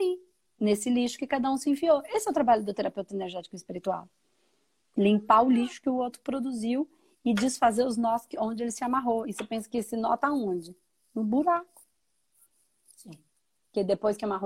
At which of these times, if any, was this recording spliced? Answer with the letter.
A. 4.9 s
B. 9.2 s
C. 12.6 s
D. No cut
D